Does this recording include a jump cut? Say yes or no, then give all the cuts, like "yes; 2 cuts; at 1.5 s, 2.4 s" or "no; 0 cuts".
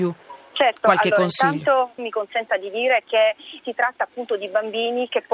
yes; 2 cuts; at 2.0 s, 3.6 s